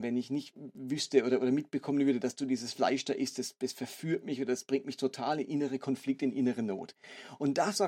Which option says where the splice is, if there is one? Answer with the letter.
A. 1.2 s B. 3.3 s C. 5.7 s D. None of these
D